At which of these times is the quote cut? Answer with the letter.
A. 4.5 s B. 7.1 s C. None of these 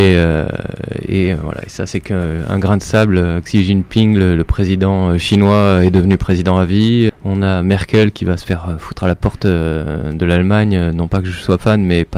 B